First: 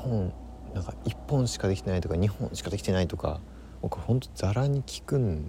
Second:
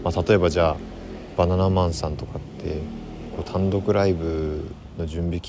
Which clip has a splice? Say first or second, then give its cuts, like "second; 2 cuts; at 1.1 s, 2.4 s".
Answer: first; 1 cut; at 1.0 s